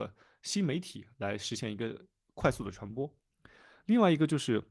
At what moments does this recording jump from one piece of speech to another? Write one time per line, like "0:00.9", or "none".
none